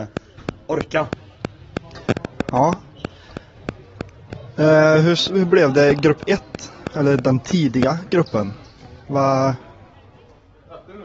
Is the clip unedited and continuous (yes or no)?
yes